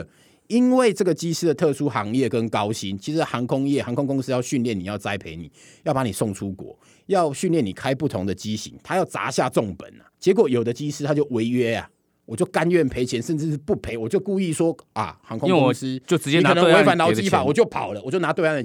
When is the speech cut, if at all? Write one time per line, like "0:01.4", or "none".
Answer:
0:10.1